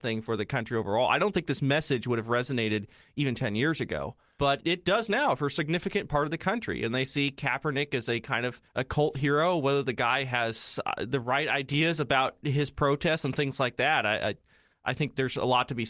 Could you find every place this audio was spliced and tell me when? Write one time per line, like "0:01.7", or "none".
0:08.7